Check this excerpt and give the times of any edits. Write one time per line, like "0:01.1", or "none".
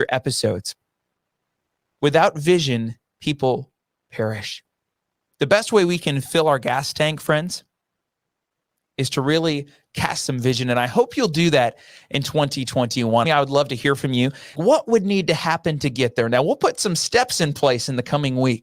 0:13.2
0:14.6